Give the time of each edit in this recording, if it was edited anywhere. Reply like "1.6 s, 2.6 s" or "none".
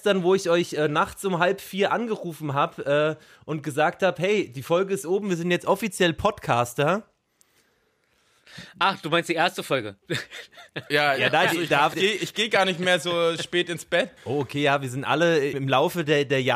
11.9 s, 14.2 s, 15.5 s